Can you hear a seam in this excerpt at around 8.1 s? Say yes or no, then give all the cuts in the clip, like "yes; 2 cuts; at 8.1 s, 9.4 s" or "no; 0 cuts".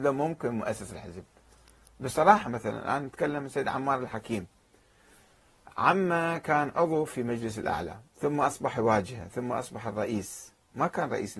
yes; 1 cut; at 8.1 s